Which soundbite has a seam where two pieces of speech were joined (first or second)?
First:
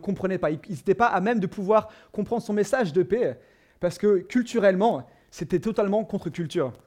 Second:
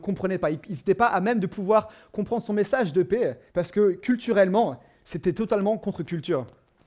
second